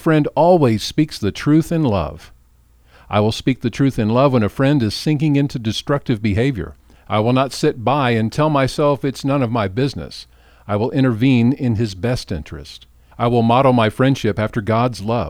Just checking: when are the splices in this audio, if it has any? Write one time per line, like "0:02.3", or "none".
0:13.1